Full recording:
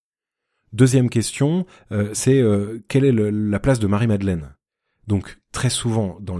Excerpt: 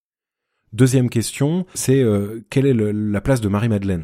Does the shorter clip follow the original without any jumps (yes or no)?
no